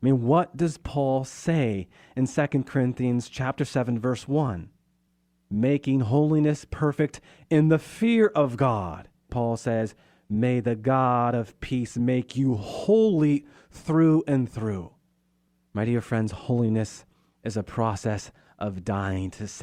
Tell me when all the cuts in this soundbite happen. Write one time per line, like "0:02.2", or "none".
0:09.3